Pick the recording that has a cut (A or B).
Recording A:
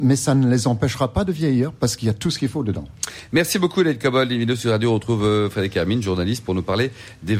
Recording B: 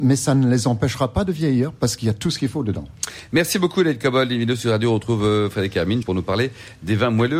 B